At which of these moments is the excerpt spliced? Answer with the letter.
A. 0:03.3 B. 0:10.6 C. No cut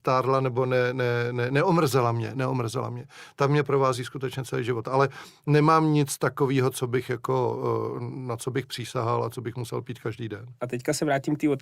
B